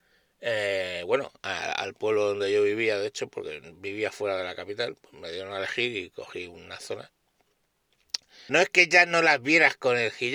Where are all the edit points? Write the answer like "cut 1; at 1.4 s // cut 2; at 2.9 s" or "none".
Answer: cut 1; at 8.5 s